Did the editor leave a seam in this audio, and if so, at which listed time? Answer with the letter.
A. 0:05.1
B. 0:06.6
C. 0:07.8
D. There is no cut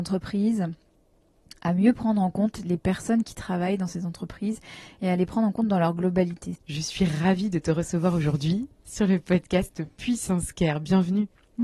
B